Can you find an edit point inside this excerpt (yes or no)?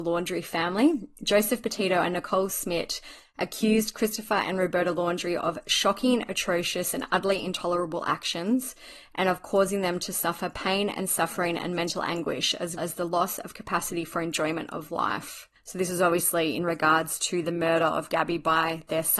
yes